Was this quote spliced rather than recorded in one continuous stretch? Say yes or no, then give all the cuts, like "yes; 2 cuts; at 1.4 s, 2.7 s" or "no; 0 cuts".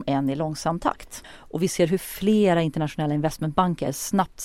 yes; 1 cut; at 1.2 s